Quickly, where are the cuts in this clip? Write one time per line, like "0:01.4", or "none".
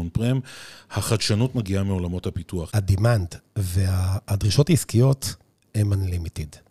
0:02.7